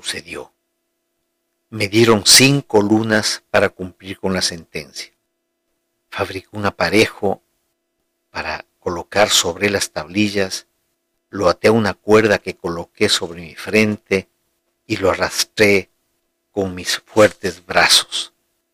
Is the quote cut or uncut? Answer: cut